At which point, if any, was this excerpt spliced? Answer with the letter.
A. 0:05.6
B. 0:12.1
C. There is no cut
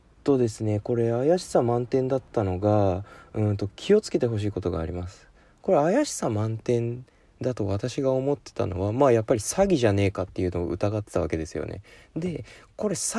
C